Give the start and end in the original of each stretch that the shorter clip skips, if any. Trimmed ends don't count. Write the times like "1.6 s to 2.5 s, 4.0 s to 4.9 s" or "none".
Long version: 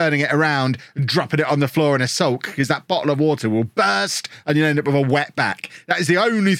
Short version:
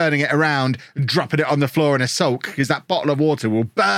none